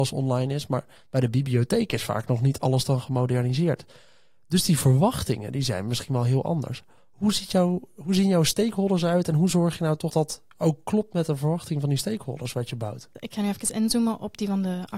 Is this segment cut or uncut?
cut